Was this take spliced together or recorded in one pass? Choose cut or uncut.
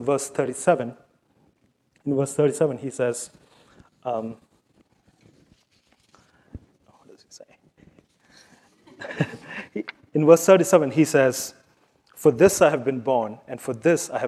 uncut